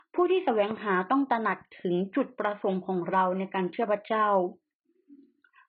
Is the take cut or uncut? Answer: uncut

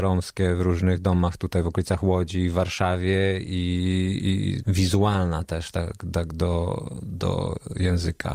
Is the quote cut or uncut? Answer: cut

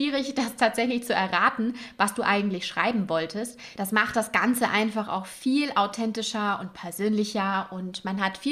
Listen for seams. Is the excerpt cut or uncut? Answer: cut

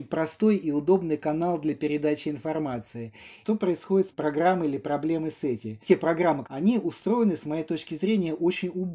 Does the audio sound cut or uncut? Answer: cut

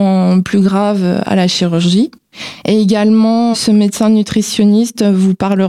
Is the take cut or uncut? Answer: uncut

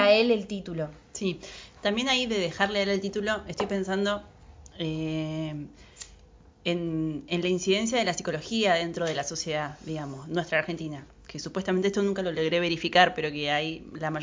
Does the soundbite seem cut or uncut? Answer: uncut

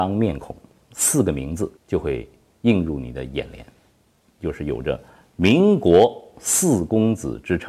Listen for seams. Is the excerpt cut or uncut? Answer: cut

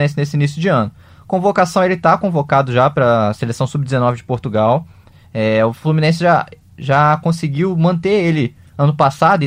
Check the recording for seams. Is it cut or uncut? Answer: uncut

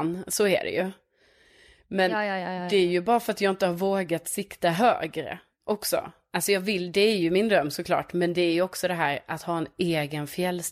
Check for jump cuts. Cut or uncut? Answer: uncut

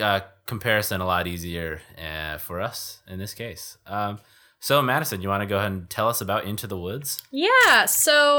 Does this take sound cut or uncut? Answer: uncut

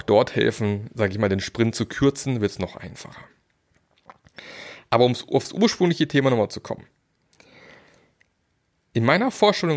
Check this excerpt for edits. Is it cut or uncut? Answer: uncut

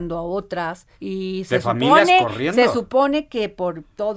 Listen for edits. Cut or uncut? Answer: cut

